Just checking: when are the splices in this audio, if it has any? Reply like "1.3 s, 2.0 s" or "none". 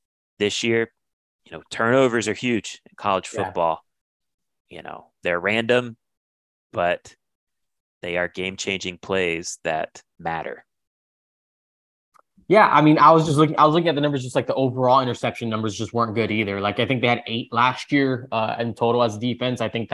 none

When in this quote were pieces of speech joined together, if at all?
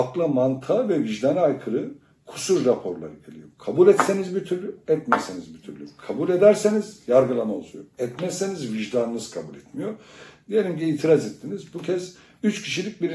none

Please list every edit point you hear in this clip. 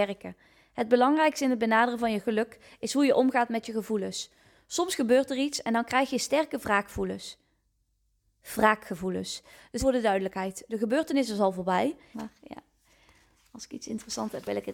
9.8 s, 12.1 s

